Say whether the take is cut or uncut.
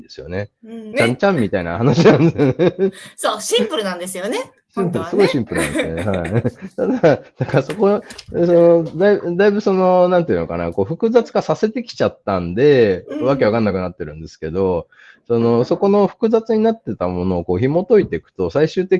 cut